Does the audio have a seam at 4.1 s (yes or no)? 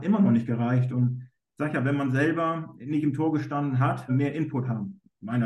yes